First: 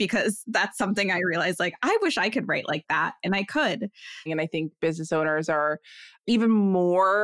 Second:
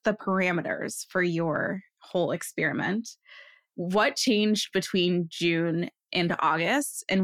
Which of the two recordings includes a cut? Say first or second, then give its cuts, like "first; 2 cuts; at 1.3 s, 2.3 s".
first; 1 cut; at 4.3 s